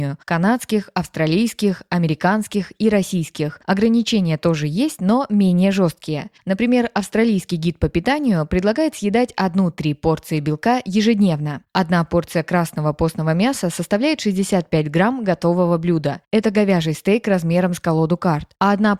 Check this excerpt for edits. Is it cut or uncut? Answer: uncut